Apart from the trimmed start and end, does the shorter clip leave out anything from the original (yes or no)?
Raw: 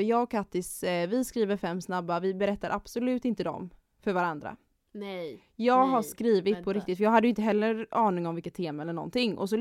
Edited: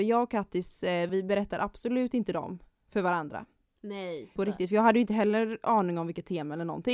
yes